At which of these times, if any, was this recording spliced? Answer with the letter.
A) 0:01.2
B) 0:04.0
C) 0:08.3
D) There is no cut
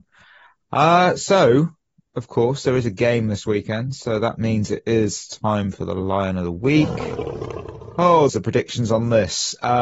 C